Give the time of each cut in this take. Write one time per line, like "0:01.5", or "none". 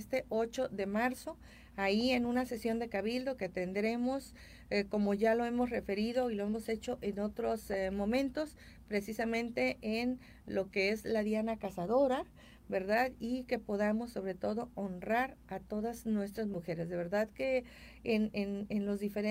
none